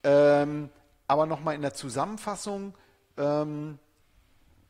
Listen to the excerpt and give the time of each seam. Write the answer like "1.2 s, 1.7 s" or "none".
none